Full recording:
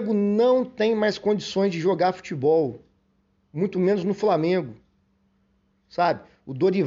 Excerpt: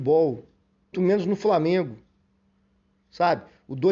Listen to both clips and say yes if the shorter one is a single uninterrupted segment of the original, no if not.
no